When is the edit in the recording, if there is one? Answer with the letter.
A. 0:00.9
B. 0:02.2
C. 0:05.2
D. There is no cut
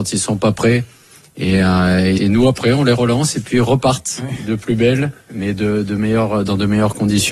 B